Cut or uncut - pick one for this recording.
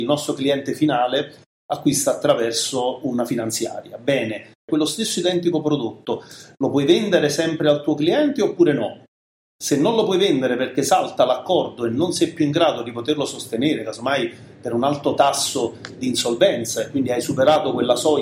cut